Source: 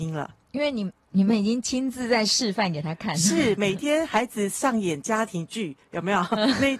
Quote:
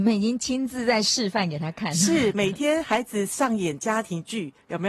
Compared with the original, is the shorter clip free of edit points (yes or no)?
yes